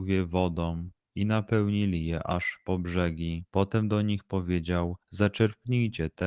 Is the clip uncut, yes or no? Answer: no